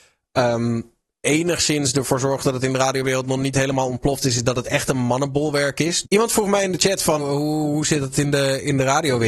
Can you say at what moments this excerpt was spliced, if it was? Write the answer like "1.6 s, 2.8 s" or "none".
1.1 s, 6.0 s, 7.2 s